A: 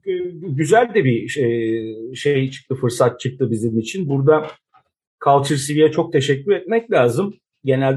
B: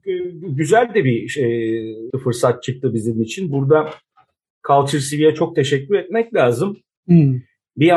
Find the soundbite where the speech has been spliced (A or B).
B